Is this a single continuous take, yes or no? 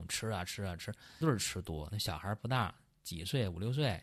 no